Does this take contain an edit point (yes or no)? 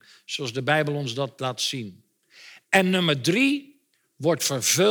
no